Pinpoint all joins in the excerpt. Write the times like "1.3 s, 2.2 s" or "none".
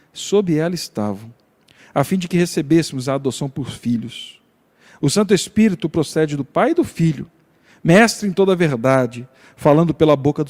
none